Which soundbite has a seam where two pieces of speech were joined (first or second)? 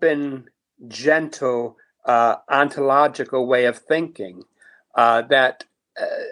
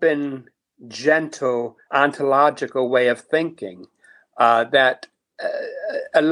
second